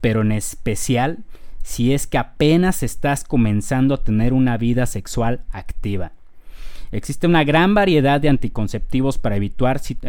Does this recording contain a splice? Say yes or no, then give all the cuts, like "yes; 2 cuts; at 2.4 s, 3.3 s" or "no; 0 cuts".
no; 0 cuts